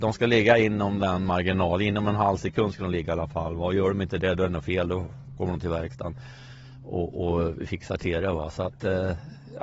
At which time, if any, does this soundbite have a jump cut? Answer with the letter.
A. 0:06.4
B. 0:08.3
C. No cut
C